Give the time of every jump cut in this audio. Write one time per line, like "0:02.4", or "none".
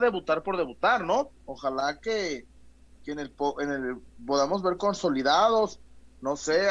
0:01.4